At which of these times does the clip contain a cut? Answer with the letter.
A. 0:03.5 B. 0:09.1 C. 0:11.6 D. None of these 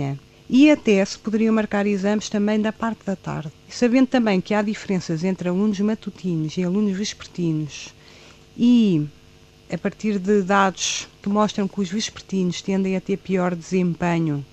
A